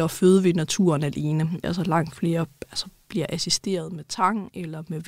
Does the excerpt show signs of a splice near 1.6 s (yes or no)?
yes